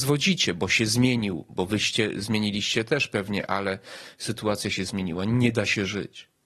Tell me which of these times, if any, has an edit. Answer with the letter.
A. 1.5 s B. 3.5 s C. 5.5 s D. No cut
D